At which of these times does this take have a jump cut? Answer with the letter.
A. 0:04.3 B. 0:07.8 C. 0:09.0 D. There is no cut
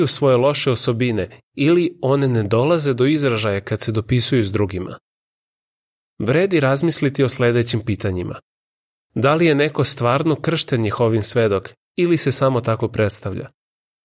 D